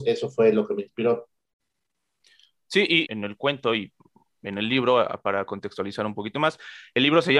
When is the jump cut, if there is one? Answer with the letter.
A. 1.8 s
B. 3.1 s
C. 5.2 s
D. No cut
B